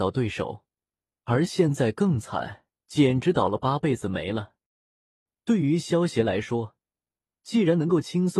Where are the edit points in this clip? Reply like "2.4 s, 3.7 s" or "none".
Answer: 1.1 s, 2.8 s